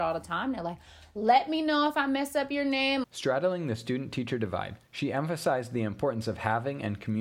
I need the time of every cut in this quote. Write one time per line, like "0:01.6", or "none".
0:03.0
0:04.8